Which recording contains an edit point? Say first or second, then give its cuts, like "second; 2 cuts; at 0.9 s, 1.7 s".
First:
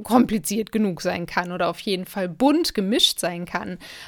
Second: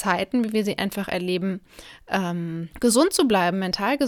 second; 1 cut; at 2.7 s